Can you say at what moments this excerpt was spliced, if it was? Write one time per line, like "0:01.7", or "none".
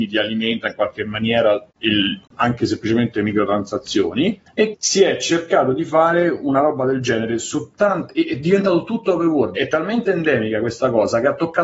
0:04.7
0:09.6